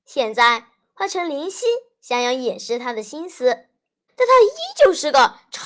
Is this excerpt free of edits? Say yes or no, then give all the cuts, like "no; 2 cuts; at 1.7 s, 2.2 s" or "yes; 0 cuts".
no; 1 cut; at 4.1 s